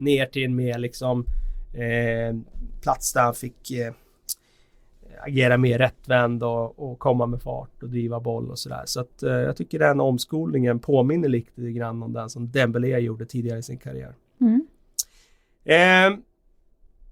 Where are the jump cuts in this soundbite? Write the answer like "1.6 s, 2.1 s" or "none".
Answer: none